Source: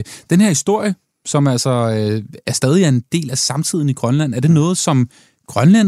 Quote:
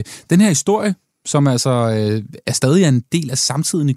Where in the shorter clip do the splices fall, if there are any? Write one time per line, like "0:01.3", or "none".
none